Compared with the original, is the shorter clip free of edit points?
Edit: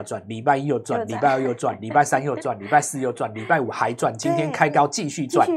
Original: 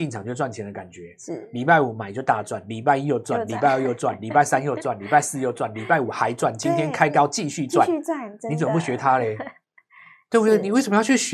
yes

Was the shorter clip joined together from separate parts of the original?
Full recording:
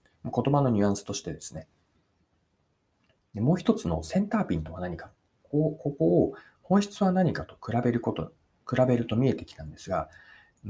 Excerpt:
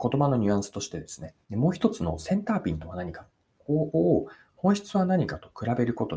yes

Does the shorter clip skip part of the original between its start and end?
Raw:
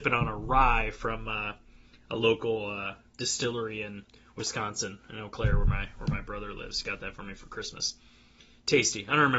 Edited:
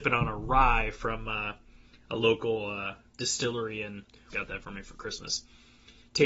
yes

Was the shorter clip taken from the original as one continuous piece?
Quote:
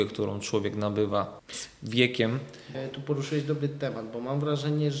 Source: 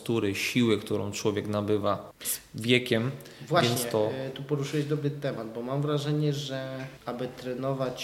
no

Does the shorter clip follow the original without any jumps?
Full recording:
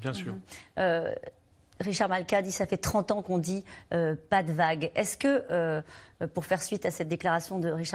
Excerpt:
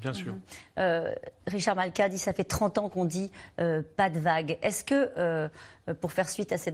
no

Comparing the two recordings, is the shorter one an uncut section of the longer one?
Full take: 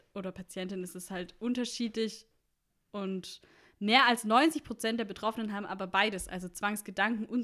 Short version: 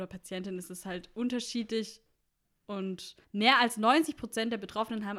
no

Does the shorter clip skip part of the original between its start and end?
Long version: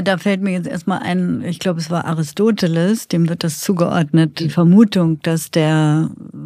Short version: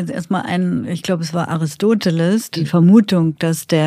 yes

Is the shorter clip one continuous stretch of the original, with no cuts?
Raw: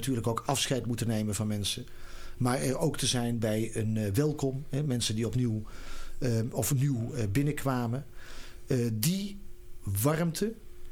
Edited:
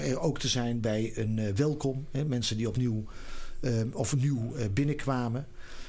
yes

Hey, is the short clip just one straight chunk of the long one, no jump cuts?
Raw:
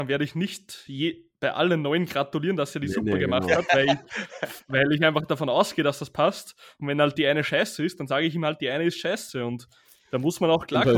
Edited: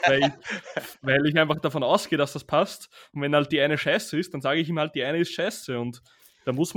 yes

